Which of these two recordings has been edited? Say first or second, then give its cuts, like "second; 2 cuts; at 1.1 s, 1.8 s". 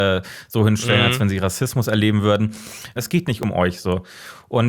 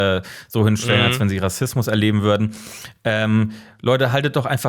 first; 1 cut; at 3.0 s